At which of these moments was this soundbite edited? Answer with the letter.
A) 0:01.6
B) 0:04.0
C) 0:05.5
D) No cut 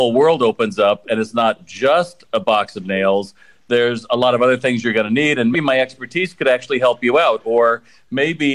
C